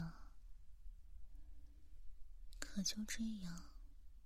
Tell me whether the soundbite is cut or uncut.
uncut